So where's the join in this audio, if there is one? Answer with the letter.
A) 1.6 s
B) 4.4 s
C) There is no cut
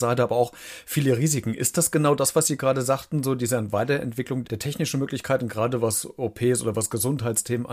B